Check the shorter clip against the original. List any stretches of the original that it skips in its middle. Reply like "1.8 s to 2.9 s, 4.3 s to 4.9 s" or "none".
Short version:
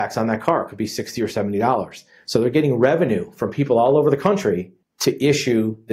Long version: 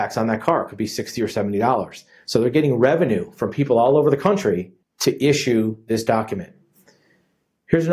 none